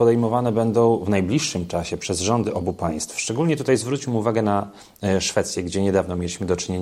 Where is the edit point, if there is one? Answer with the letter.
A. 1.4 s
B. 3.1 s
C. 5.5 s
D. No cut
D